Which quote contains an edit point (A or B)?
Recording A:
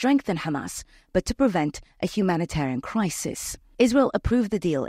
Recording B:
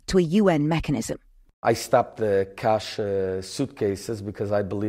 A